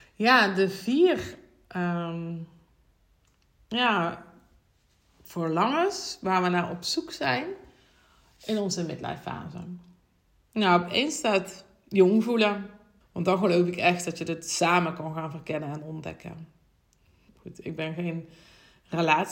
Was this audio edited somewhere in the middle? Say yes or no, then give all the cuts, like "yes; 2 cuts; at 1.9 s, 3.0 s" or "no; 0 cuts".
yes; 2 cuts; at 13.0 s, 17.3 s